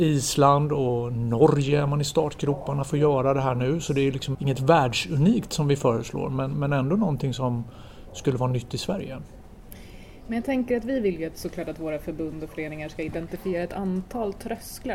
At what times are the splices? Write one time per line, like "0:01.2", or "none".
0:04.3